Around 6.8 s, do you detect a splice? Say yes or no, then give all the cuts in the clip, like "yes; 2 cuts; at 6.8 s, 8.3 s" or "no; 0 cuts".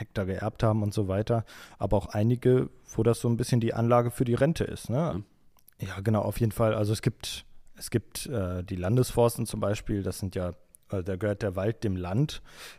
no; 1 cut; at 5.1 s